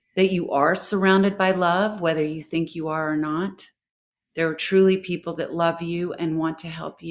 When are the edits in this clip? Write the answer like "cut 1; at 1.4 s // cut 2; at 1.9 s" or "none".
none